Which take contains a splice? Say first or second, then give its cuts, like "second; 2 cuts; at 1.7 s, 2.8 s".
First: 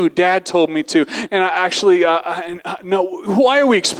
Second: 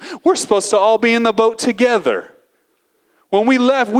first; 1 cut; at 1.3 s